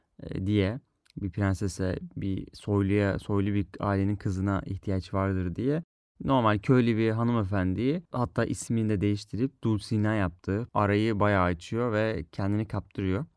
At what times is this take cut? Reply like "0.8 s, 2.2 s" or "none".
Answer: 10.7 s